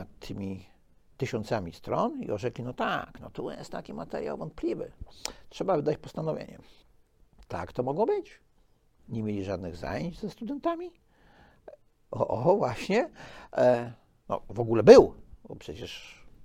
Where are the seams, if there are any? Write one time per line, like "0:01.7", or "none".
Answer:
0:09.0
0:12.1
0:13.5